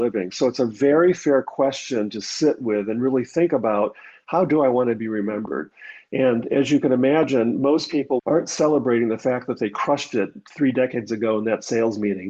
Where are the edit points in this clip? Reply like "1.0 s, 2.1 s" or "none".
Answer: 8.2 s